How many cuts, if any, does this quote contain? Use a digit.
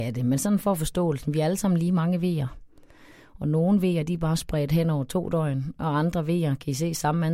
0